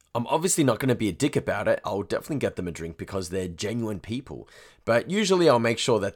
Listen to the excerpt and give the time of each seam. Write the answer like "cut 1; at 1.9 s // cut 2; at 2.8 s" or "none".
cut 1; at 1.8 s